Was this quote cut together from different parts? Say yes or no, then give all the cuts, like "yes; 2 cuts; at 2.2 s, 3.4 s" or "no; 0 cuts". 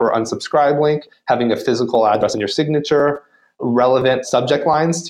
no; 0 cuts